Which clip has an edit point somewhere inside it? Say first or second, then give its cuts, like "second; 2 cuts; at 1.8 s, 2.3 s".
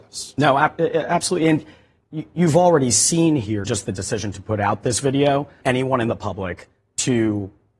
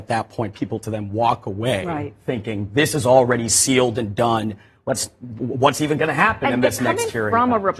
first; 2 cuts; at 3.6 s, 5.6 s